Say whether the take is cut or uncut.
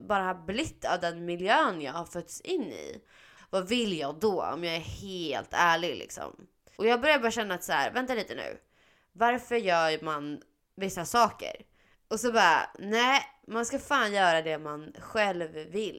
cut